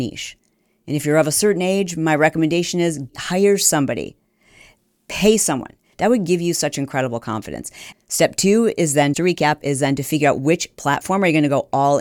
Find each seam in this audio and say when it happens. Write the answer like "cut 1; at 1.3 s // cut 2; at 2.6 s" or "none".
cut 1; at 5.9 s // cut 2; at 7.9 s // cut 3; at 9.1 s